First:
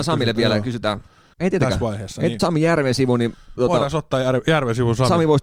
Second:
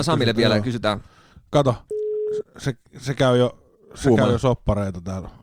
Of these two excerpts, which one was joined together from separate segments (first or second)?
first